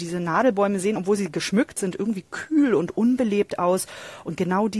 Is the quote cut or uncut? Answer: uncut